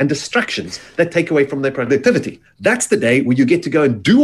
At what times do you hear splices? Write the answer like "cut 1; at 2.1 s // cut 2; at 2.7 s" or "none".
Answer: cut 1; at 2.5 s